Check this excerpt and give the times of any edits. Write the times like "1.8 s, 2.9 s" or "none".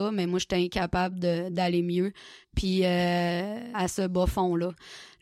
2.4 s, 3.7 s